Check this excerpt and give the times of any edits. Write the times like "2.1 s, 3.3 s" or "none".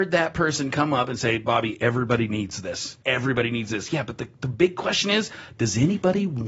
3.0 s